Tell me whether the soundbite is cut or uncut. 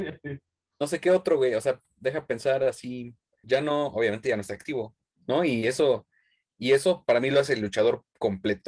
cut